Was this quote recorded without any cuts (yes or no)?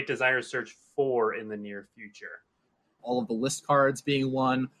no